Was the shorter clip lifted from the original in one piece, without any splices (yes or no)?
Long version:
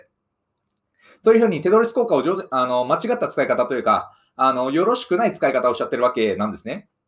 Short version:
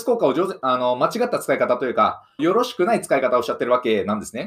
no